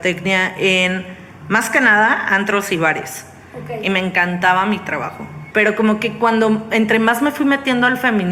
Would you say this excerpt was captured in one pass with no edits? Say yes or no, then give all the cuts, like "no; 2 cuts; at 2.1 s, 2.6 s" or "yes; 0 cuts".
no; 1 cut; at 5.5 s